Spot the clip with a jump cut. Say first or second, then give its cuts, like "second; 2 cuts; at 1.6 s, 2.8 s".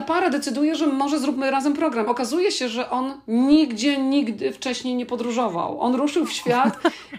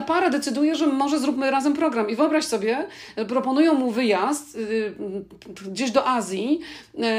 first; 1 cut; at 2.1 s